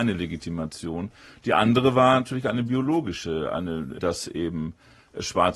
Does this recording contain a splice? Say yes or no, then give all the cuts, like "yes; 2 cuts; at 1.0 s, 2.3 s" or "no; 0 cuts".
yes; 1 cut; at 4.0 s